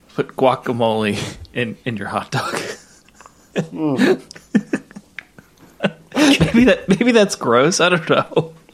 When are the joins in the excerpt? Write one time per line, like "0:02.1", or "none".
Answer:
none

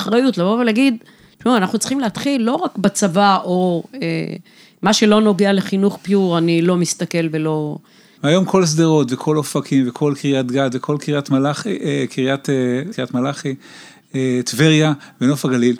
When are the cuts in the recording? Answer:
0:08.2
0:12.9

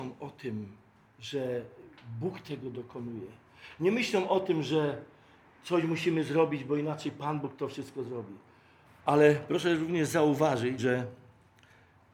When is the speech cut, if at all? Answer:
0:08.8
0:10.8

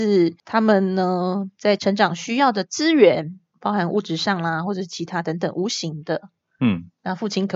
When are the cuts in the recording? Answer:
none

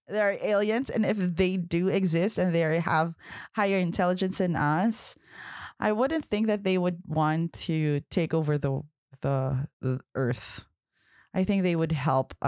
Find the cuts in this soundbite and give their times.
0:09.7

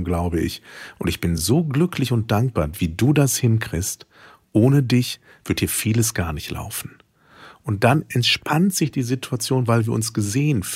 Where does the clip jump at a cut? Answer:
none

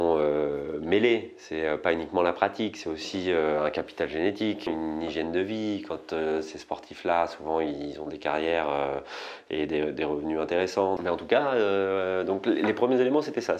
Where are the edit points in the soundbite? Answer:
0:04.7
0:11.0

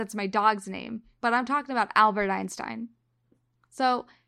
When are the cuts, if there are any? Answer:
none

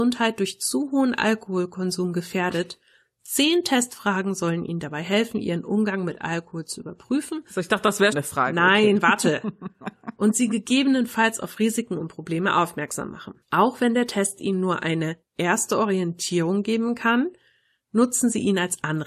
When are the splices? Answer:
0:08.1
0:13.4

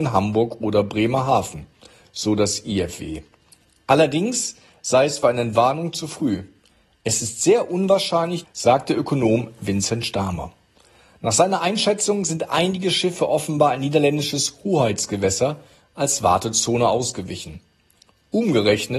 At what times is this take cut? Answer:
0:08.4

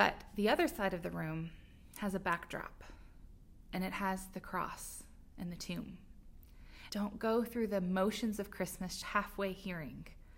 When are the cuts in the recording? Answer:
0:06.9
0:09.0

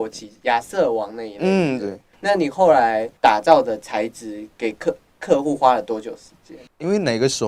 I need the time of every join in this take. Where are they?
0:01.8

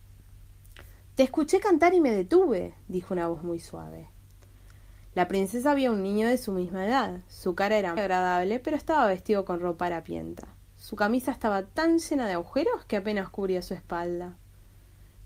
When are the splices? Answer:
0:08.0

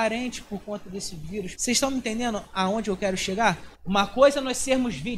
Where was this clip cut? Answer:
0:01.5
0:03.7

